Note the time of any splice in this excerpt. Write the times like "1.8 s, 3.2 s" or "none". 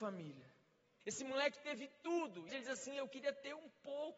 1.0 s, 2.5 s